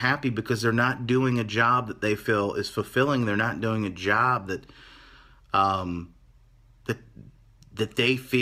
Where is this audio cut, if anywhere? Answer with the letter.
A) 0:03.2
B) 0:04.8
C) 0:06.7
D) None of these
D